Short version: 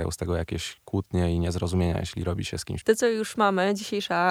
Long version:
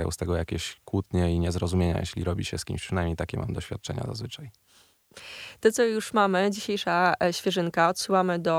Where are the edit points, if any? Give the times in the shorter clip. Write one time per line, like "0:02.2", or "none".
0:02.8